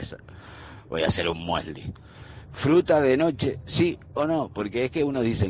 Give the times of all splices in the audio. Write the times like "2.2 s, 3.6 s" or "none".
2.5 s